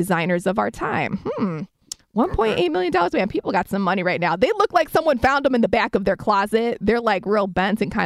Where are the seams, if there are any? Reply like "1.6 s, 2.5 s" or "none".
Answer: none